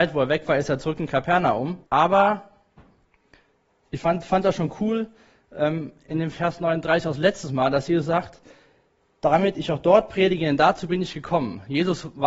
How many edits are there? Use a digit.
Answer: 1